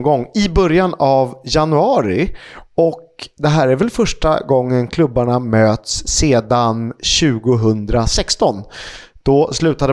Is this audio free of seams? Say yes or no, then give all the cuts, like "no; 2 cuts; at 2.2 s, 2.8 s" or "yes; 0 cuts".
yes; 0 cuts